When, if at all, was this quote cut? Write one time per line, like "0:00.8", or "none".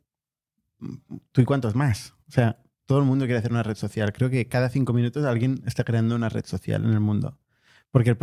none

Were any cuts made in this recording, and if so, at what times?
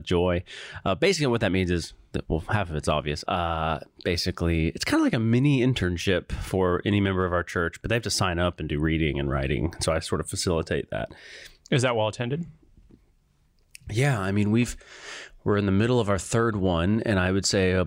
0:03.2

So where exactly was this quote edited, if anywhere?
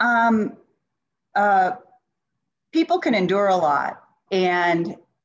0:01.3
0:04.3

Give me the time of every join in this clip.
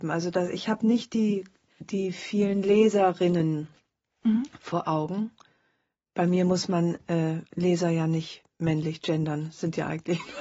0:01.8

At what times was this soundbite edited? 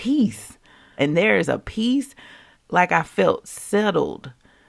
0:01.0
0:02.5

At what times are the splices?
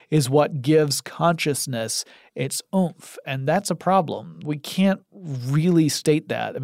none

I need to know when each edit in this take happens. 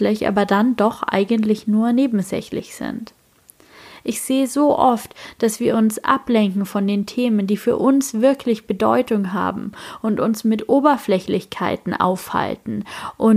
none

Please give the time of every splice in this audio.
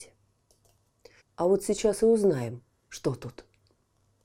0:01.2

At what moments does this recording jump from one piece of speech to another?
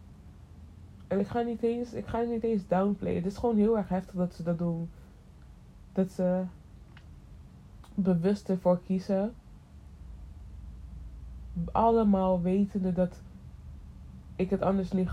none

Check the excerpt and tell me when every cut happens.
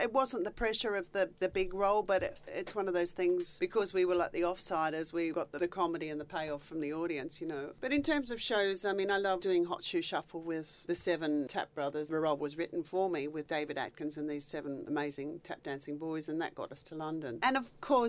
none

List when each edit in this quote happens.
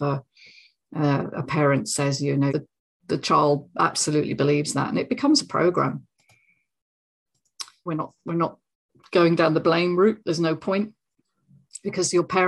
0:02.5
0:07.9

